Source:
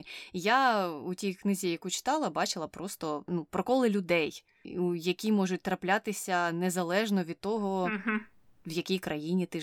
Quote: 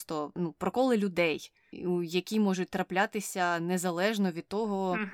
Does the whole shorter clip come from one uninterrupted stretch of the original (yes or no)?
yes